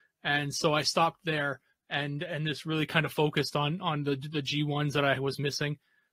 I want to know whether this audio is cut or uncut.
uncut